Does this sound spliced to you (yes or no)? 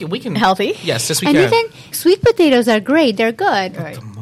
yes